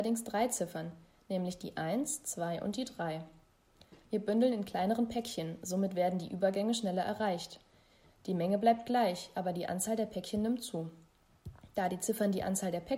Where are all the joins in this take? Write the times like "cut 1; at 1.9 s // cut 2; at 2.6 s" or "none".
none